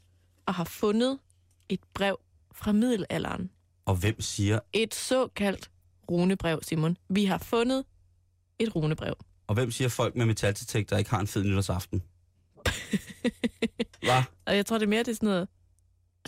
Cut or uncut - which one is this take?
uncut